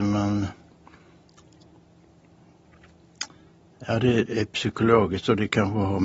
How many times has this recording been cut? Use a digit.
1